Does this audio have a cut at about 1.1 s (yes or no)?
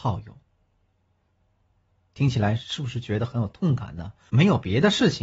no